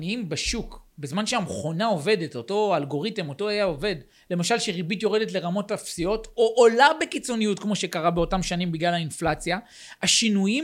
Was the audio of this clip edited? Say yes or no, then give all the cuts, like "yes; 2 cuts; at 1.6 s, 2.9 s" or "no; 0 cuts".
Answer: no; 0 cuts